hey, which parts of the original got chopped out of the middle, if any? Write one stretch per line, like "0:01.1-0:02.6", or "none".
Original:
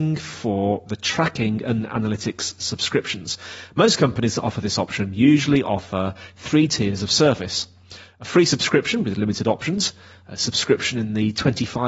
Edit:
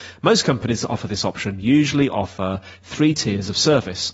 none